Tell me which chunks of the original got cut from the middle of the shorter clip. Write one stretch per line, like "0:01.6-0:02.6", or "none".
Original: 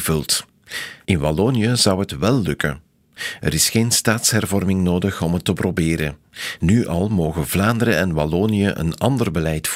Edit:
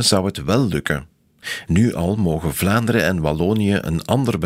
0:03.4-0:06.6